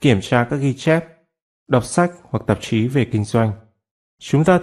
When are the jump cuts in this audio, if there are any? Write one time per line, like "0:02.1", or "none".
0:01.5